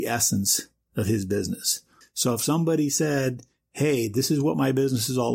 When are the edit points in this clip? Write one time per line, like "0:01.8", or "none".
0:02.0

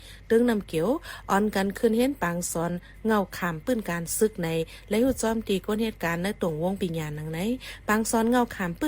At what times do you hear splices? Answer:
0:06.8

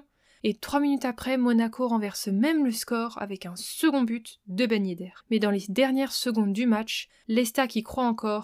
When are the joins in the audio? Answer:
0:05.2

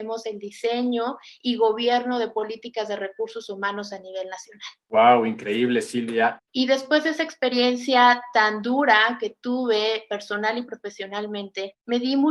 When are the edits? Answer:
0:04.8
0:06.4

